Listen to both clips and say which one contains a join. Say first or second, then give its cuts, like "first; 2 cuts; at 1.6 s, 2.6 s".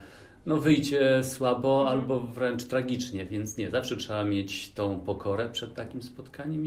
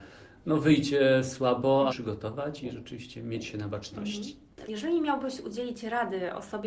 second; 2 cuts; at 1.9 s, 4.6 s